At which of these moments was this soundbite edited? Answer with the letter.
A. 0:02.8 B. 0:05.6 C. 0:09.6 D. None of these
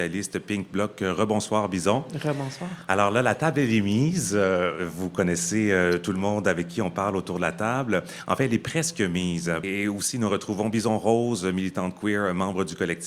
C